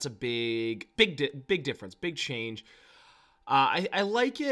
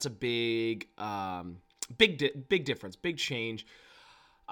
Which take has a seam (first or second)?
first